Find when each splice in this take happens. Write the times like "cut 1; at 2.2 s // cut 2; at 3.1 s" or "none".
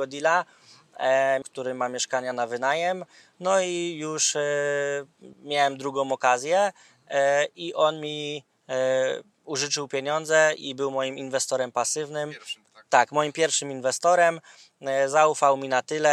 cut 1; at 1.4 s // cut 2; at 5.3 s